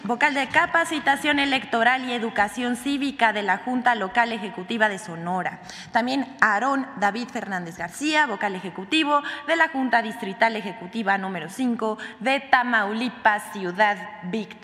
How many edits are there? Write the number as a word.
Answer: zero